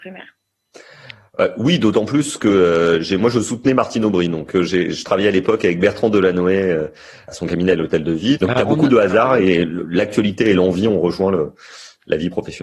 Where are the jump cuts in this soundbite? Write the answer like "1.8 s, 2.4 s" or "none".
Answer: 7.3 s, 8.4 s